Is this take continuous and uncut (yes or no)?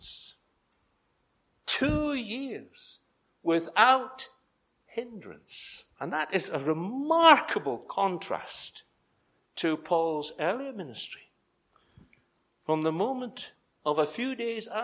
no